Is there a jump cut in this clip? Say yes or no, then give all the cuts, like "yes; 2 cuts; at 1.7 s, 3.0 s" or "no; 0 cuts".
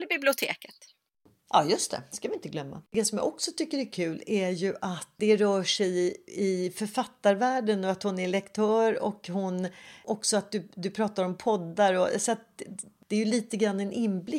no; 0 cuts